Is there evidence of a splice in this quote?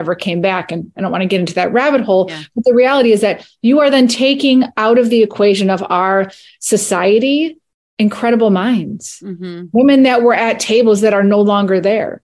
no; 0 cuts

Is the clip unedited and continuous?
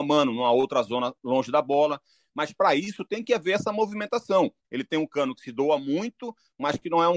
no; 1 cut; at 4.6 s

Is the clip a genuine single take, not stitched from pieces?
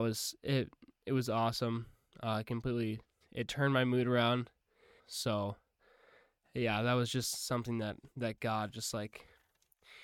no; 2 cuts; at 5.0 s, 8.1 s

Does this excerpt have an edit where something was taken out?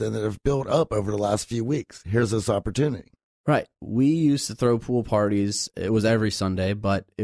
no; 0 cuts

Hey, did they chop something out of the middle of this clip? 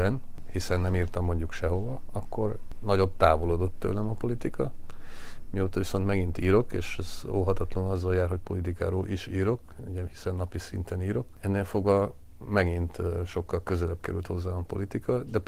no; 0 cuts

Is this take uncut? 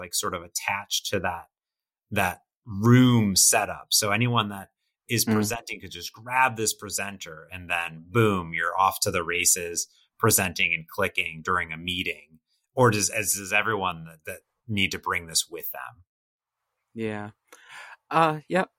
yes; 0 cuts

